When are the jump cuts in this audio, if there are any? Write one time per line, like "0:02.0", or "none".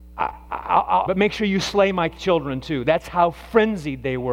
0:01.1